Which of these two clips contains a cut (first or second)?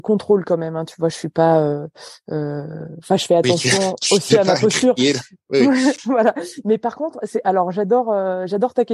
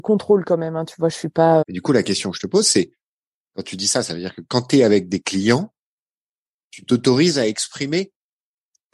second